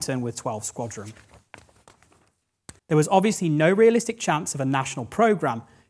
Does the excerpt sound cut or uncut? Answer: cut